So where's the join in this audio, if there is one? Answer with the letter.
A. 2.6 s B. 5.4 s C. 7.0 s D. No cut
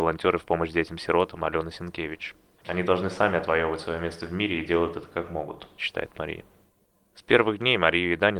A